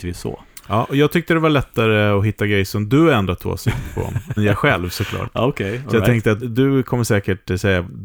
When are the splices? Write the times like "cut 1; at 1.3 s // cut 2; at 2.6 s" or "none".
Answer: cut 1; at 4.4 s // cut 2; at 6.4 s